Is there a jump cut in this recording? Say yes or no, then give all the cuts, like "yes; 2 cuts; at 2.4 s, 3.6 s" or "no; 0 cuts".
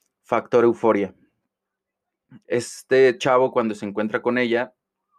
yes; 1 cut; at 2.4 s